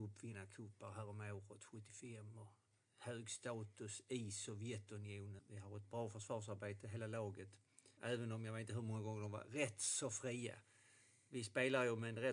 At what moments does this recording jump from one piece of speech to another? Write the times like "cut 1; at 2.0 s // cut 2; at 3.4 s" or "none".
cut 1; at 5.4 s // cut 2; at 8.0 s

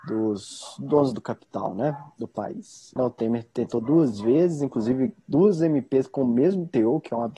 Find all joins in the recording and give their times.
cut 1; at 3.0 s

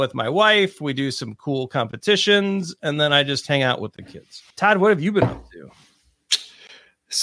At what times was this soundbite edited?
cut 1; at 4.5 s

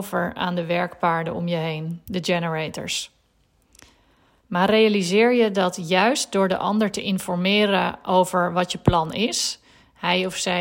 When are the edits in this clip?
cut 1; at 4.4 s

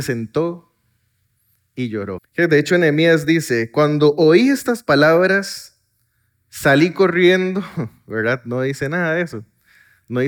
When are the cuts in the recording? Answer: cut 1; at 2.2 s

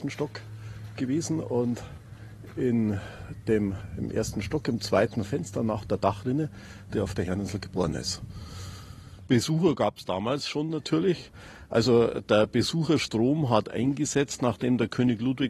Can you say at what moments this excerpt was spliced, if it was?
cut 1; at 6.9 s

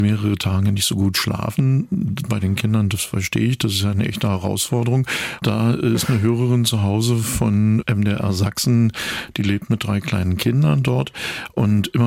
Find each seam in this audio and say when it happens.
cut 1; at 5.4 s

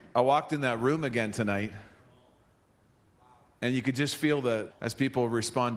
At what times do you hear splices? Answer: cut 1; at 4.7 s

